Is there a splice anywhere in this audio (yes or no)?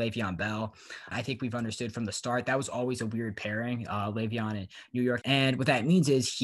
yes